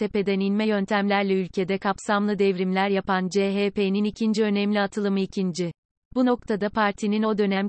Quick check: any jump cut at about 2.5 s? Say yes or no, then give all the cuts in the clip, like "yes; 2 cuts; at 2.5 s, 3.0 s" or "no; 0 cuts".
no; 1 cut; at 6.0 s